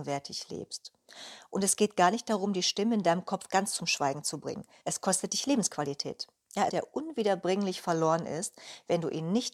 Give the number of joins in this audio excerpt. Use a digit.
2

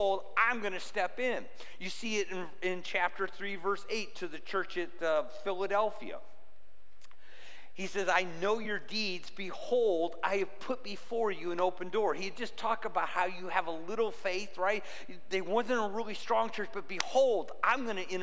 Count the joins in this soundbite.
0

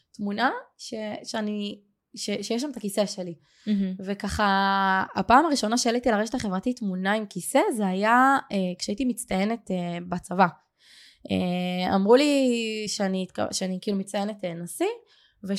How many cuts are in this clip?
0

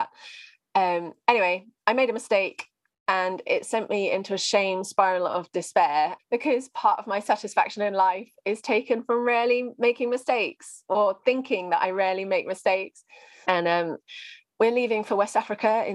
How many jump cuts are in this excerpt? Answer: 2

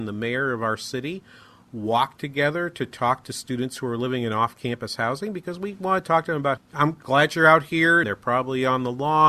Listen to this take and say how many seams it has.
2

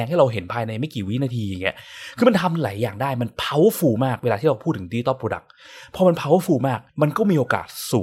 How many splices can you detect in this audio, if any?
1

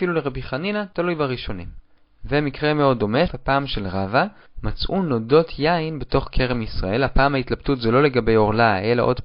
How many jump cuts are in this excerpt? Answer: 1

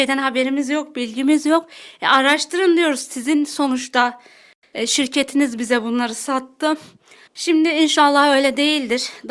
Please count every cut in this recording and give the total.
1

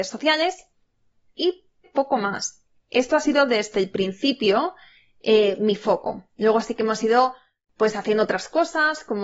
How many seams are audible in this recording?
1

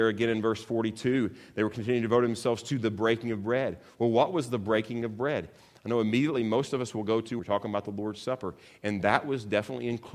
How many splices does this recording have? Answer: 1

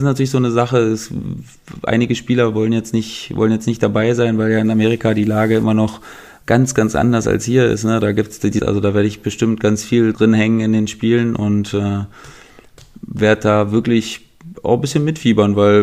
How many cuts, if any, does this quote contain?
1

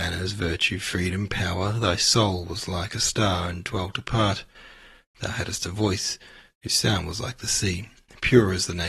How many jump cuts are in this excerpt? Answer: 0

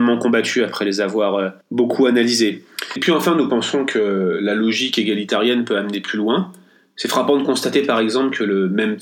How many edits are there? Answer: 1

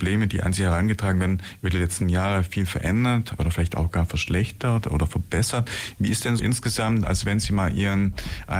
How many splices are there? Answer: 1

